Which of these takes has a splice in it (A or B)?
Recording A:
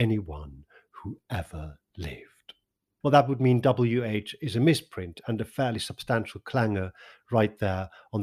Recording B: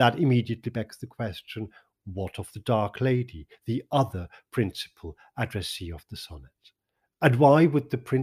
A